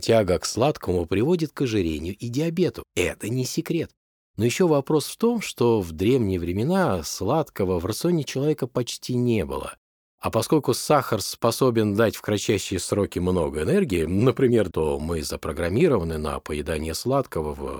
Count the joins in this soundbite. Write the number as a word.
one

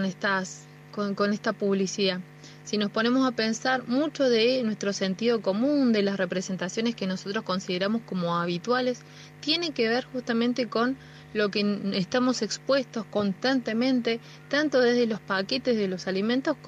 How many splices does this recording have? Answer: zero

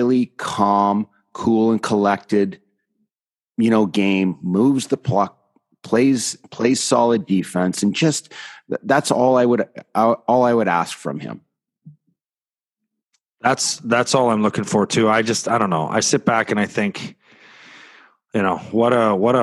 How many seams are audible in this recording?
zero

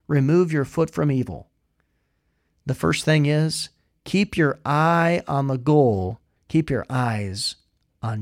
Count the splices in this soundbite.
one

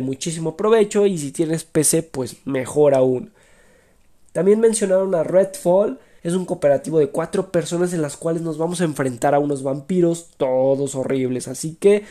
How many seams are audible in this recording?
one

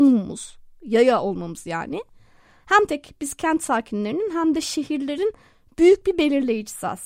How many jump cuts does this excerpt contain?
one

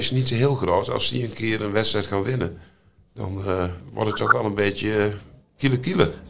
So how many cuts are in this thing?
zero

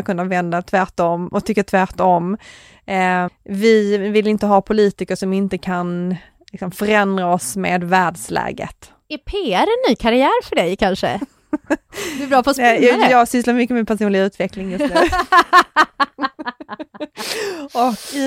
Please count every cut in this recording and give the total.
one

